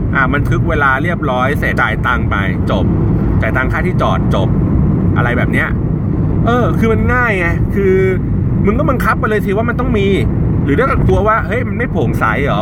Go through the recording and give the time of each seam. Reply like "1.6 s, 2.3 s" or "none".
1.8 s